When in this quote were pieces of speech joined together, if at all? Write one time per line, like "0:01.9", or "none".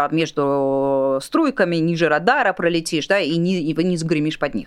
none